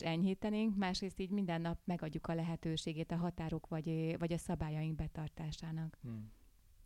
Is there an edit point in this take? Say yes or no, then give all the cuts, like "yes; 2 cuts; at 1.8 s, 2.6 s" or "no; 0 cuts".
no; 0 cuts